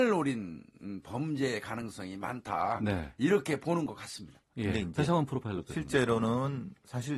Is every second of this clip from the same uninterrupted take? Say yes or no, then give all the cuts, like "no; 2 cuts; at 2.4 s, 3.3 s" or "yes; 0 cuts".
yes; 0 cuts